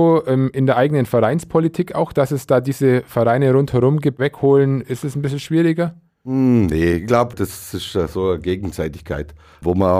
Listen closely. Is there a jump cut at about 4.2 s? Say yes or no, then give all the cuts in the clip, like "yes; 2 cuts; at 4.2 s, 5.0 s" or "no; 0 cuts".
yes; 1 cut; at 4.2 s